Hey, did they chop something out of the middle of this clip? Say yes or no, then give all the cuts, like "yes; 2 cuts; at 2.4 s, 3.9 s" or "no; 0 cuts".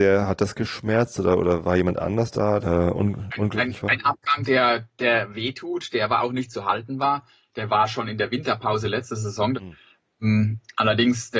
yes; 2 cuts; at 2.6 s, 9.5 s